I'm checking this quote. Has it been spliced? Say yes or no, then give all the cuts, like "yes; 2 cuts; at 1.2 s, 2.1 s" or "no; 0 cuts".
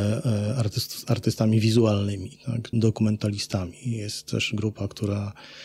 yes; 1 cut; at 2.7 s